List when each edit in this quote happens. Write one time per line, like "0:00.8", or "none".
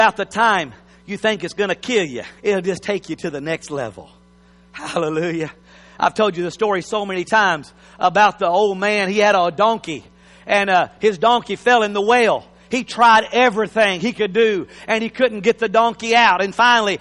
0:02.4